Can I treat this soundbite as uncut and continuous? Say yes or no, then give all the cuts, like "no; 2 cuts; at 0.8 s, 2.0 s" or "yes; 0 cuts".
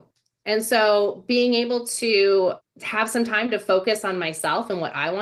yes; 0 cuts